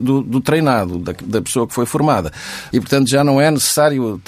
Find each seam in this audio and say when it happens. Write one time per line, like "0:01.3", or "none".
0:02.7